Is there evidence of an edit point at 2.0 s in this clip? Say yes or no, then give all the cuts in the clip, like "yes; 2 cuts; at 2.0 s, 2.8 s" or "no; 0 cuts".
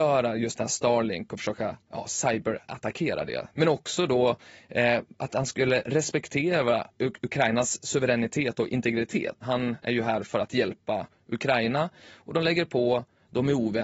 no; 2 cuts; at 3.5 s, 9.4 s